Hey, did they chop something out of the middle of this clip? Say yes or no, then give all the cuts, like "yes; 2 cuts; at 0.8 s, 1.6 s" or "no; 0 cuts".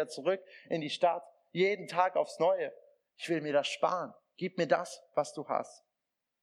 no; 0 cuts